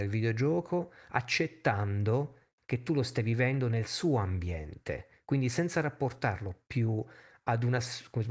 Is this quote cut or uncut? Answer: uncut